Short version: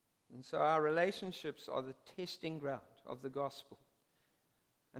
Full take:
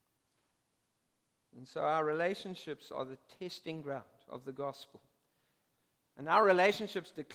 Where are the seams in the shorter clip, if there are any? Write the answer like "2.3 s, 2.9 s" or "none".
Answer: none